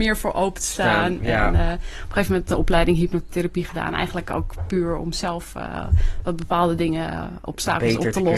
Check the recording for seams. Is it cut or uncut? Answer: uncut